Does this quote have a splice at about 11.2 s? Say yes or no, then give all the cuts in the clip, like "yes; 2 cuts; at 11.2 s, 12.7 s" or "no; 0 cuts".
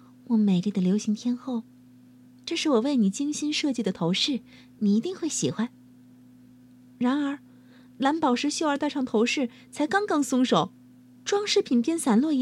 yes; 1 cut; at 11.2 s